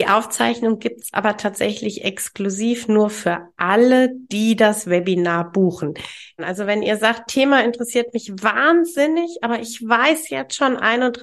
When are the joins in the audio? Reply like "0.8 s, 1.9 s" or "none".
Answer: 6.4 s